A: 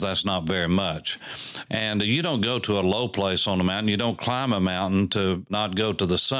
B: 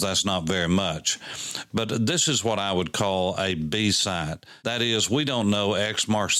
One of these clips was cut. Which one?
A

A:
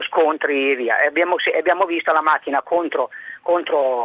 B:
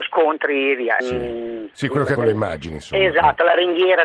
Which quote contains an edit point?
B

